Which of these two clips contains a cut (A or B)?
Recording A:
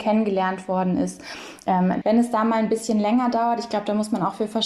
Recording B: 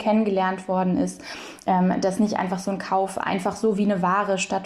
A